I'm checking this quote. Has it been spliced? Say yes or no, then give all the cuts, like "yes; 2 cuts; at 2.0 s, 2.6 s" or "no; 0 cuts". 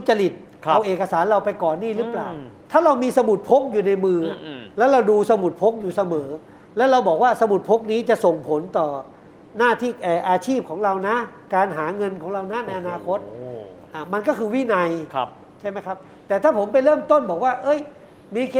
no; 0 cuts